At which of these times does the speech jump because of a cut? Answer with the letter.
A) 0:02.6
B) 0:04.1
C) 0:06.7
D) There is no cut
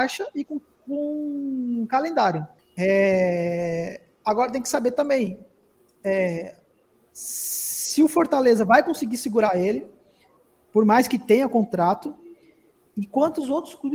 A